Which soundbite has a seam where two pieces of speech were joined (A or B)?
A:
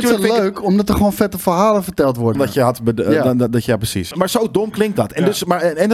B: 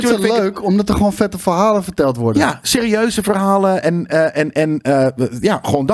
A